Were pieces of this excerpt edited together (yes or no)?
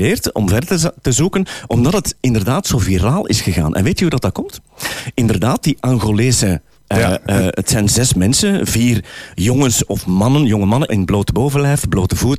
no